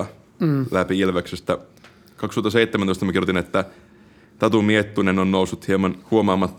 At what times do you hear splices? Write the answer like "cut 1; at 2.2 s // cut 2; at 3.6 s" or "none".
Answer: none